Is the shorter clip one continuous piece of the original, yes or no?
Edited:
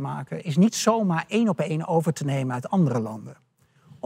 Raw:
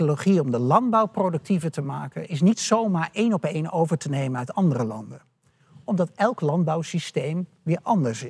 yes